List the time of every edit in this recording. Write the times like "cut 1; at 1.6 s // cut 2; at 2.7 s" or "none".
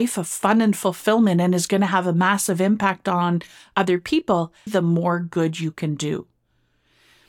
cut 1; at 4.7 s